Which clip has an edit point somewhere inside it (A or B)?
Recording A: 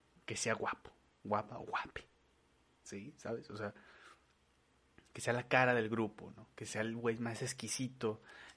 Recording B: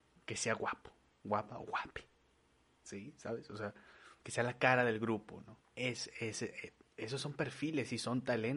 B